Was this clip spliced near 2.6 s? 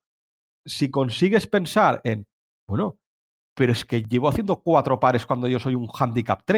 no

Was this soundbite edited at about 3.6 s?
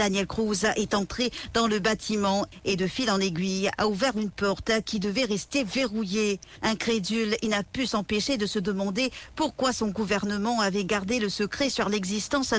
no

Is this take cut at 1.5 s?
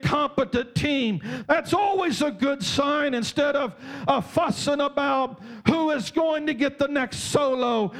yes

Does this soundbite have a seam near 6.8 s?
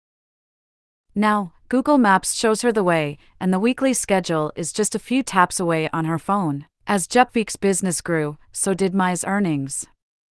yes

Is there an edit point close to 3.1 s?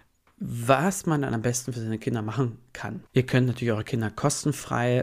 yes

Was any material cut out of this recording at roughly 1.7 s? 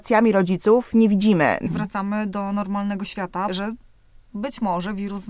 yes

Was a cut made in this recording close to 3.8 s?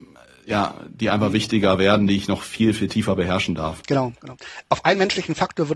yes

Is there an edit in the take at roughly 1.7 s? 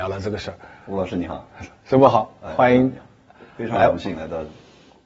no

